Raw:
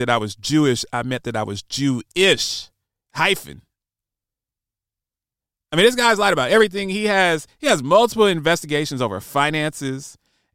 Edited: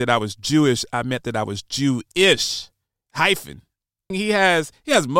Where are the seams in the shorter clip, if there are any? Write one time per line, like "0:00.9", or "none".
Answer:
0:04.1